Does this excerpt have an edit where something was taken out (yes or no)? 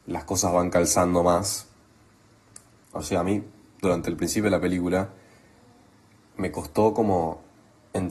yes